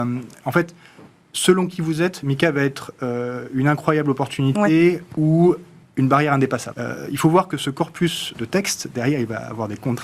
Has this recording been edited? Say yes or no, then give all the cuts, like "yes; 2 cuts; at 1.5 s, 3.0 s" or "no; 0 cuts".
yes; 2 cuts; at 6.7 s, 8.3 s